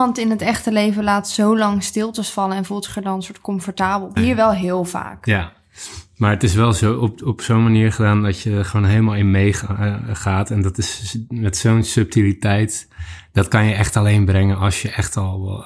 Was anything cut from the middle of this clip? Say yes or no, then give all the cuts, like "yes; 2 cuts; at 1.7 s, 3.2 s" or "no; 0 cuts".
yes; 1 cut; at 4.2 s